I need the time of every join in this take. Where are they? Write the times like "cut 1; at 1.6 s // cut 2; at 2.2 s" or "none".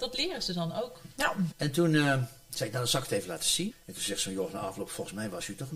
cut 1; at 1.5 s // cut 2; at 3.7 s